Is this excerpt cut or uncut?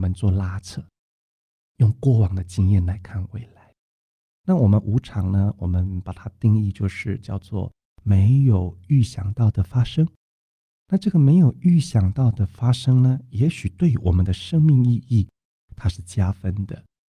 cut